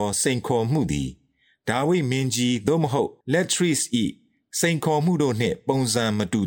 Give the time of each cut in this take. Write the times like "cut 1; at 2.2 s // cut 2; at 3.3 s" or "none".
cut 1; at 3.2 s